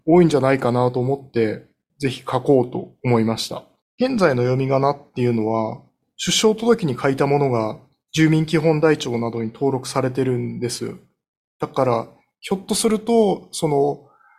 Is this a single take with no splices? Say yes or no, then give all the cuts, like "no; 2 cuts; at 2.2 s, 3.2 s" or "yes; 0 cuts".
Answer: no; 1 cut; at 3.9 s